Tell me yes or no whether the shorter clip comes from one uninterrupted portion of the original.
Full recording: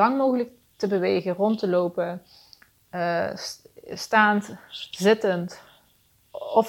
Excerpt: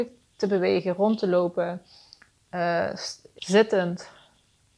no